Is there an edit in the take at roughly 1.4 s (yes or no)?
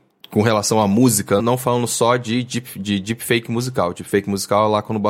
yes